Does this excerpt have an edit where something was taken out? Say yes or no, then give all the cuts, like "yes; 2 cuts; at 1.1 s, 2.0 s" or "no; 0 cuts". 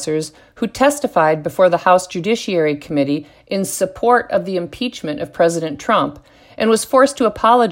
no; 0 cuts